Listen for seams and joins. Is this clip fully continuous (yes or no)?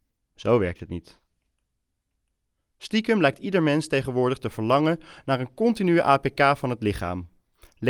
yes